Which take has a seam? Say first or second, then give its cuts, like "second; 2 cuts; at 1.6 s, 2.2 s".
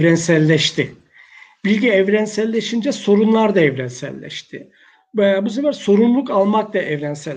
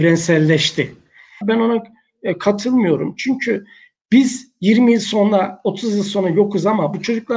second; 1 cut; at 1.4 s